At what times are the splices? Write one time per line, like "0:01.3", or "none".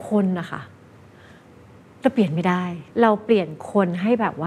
0:02.9